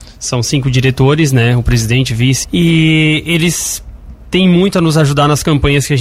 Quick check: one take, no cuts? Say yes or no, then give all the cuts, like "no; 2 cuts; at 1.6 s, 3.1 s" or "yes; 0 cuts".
no; 1 cut; at 2.4 s